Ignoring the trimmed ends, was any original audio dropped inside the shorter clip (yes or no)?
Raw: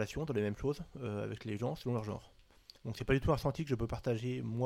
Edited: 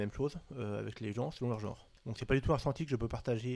yes